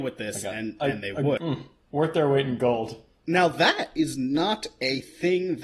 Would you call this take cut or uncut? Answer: cut